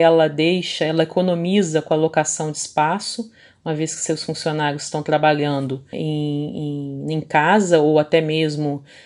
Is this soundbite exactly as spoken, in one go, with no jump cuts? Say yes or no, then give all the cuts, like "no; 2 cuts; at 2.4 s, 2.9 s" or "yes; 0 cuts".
no; 1 cut; at 5.9 s